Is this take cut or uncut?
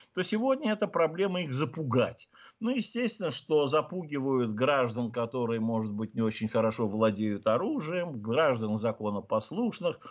uncut